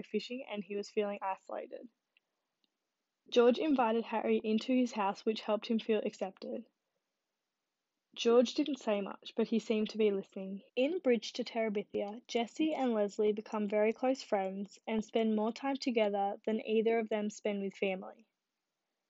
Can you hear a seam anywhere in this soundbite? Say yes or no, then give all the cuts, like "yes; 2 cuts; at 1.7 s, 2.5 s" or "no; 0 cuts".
yes; 1 cut; at 10.7 s